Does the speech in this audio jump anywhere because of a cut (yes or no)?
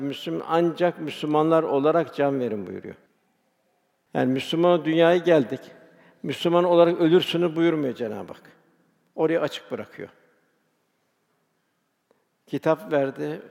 yes